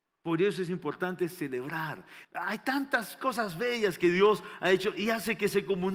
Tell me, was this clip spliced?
yes; 1 cut; at 2.2 s

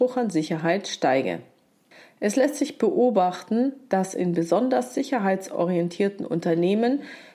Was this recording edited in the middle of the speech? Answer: no; 0 cuts

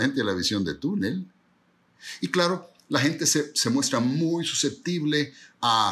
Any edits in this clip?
no; 0 cuts

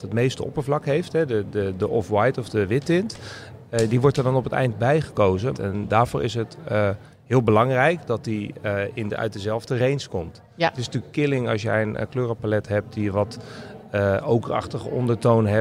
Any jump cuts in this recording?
yes; 1 cut; at 5.5 s

